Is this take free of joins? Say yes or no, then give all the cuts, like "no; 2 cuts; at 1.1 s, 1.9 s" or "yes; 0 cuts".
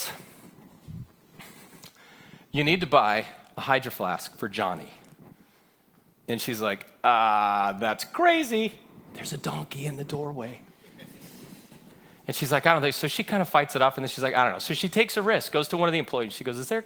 yes; 0 cuts